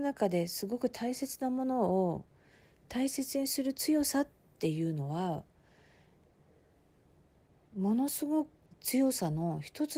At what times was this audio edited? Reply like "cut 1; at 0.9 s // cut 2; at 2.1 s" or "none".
cut 1; at 8.7 s